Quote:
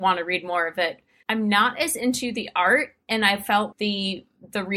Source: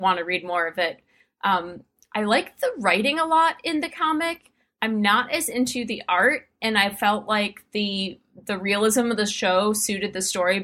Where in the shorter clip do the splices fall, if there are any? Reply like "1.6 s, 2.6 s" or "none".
1.2 s, 3.7 s